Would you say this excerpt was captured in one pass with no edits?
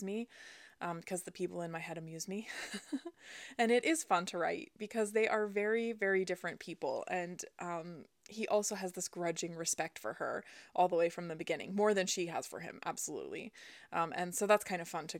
yes; 0 cuts

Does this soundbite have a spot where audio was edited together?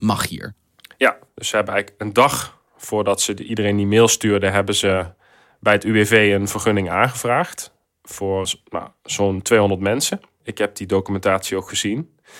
yes; 1 cut; at 8.4 s

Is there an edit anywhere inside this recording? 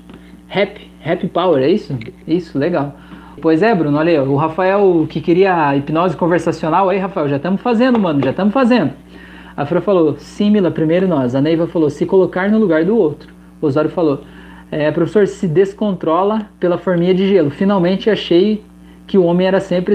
yes; 1 cut; at 3.4 s

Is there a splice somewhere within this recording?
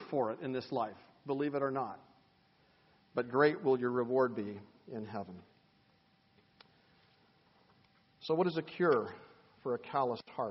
no; 0 cuts

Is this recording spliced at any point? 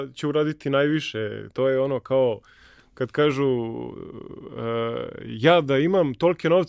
no; 0 cuts

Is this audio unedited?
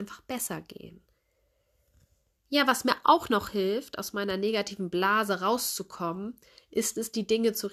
yes; 0 cuts

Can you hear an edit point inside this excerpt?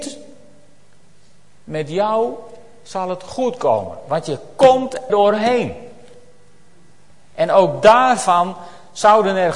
yes; 1 cut; at 5.1 s

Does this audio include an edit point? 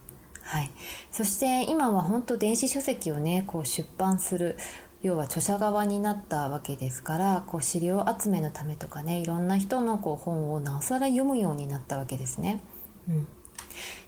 no; 0 cuts

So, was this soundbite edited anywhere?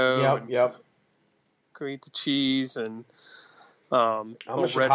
no; 0 cuts

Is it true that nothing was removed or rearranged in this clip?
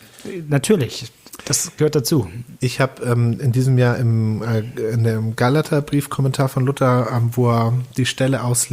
yes; 0 cuts

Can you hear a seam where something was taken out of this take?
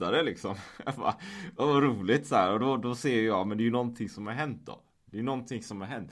no; 0 cuts

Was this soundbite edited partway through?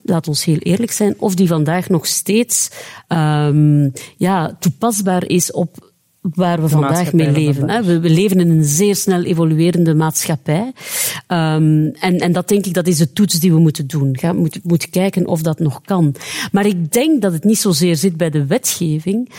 no; 0 cuts

